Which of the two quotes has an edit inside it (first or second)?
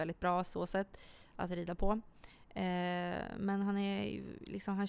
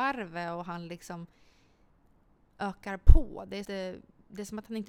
second